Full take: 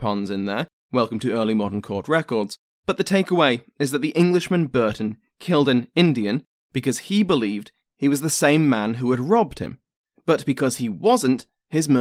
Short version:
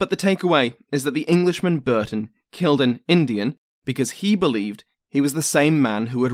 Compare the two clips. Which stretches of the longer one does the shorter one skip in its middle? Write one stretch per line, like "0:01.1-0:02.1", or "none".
none